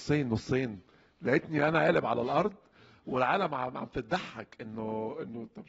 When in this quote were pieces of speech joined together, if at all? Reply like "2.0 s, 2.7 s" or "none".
none